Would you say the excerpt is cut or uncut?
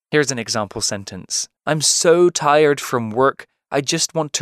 cut